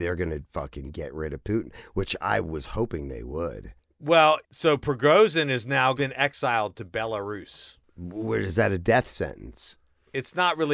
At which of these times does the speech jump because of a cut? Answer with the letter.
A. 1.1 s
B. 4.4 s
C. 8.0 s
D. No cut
B